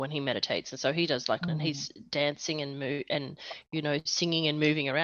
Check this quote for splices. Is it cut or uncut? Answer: cut